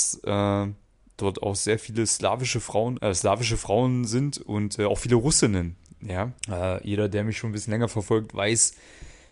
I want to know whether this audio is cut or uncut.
cut